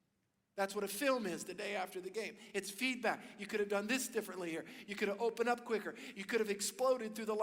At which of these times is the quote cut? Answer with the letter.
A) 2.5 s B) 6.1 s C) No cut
C